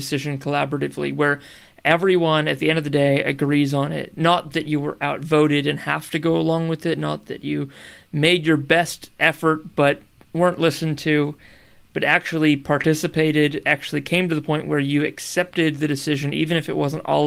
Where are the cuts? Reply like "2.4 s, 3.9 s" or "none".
none

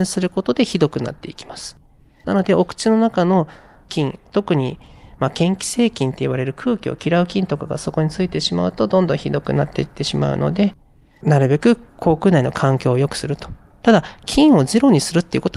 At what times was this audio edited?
none

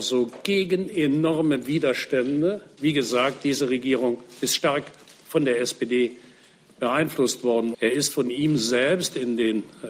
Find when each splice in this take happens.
2.8 s, 7.7 s

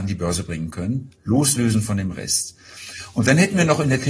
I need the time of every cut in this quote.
1.2 s

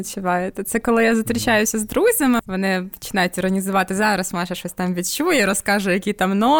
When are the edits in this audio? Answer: 2.4 s

